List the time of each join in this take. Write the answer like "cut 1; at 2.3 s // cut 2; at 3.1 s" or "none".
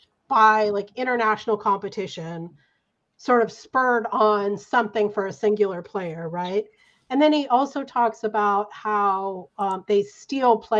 none